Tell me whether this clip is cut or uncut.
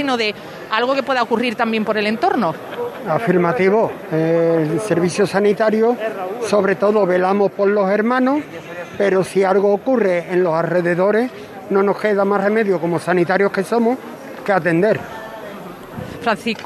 uncut